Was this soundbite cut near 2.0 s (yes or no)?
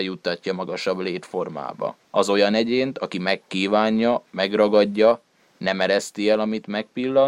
yes